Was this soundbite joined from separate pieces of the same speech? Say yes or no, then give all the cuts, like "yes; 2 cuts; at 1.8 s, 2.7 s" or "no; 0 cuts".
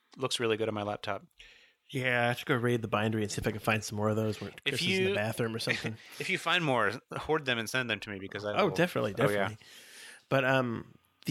no; 0 cuts